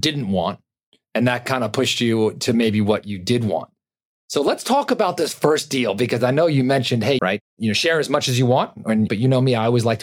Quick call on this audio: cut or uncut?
cut